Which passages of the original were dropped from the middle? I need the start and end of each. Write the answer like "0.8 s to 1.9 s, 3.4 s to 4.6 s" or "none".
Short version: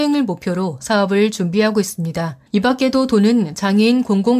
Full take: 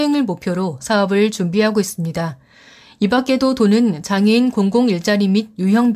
2.5 s to 2.9 s

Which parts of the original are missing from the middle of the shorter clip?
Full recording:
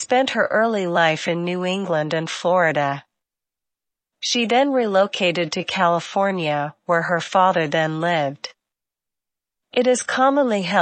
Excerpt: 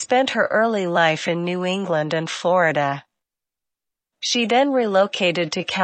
none

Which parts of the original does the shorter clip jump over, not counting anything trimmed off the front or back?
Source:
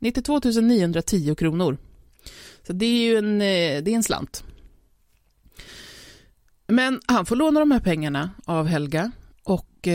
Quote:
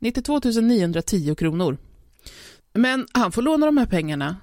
2.6 s to 6.5 s

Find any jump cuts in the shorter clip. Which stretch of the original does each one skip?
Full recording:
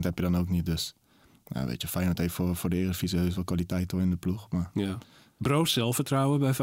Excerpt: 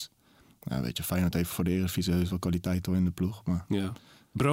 2.4 s to 2.6 s

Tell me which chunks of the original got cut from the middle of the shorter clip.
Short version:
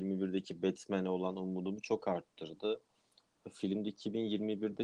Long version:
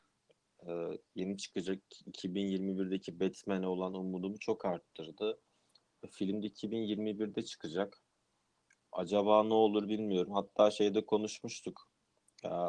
none

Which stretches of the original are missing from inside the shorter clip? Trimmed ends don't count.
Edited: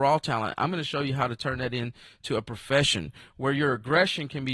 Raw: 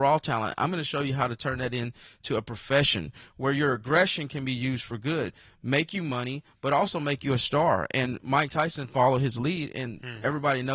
none

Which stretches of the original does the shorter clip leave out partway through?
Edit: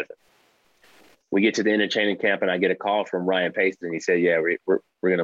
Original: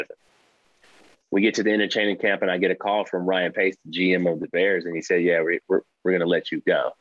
3.8 s to 4.8 s

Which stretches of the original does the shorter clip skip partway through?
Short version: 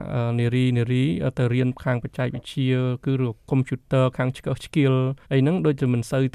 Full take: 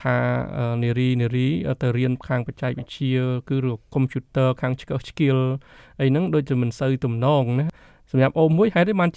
5.7 s to 5.9 s

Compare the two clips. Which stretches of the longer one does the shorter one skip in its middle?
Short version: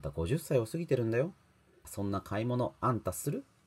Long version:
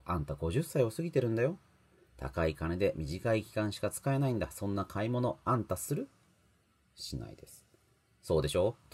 2.1 s to 4.5 s

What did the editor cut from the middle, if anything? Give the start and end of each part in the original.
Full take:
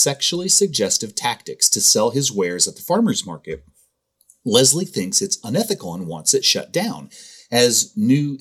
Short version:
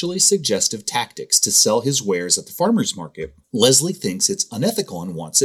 3.7 s to 4.4 s

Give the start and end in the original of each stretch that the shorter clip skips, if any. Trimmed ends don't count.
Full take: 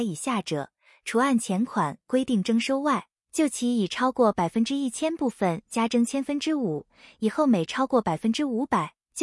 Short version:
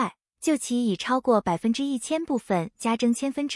none

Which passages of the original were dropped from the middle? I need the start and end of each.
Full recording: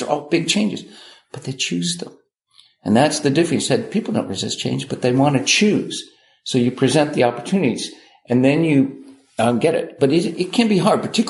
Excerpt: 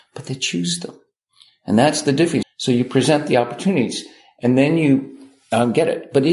3.6 s to 6.3 s

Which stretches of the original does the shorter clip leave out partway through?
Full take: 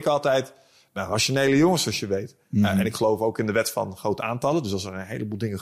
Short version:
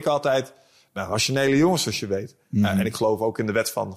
none

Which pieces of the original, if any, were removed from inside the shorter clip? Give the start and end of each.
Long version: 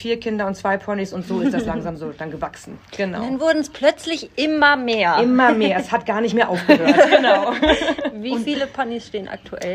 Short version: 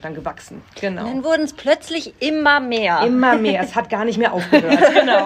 none

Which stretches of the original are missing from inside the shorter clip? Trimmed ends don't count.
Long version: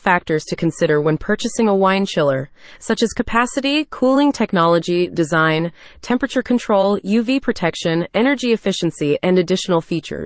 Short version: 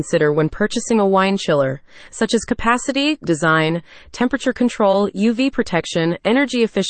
3.9 s to 5.1 s

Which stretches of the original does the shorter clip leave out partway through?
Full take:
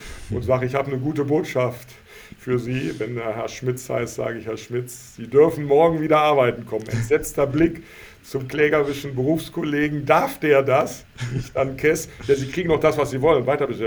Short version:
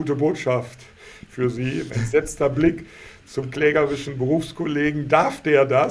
3.0 s to 6.9 s

